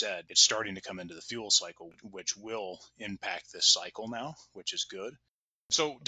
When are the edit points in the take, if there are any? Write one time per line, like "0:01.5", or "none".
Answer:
none